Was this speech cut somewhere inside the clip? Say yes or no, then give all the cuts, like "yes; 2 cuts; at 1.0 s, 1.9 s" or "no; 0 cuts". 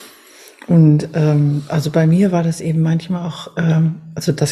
no; 0 cuts